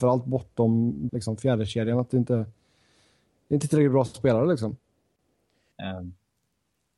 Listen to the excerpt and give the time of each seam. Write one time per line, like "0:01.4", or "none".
0:01.1
0:05.7